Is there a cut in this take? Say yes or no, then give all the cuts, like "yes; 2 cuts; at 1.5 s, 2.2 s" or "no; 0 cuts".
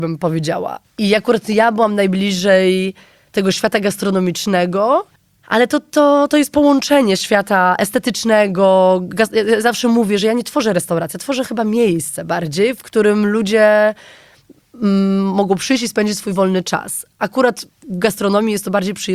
no; 0 cuts